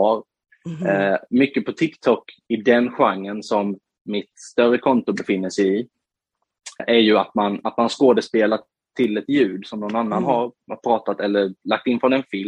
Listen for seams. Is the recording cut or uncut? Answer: cut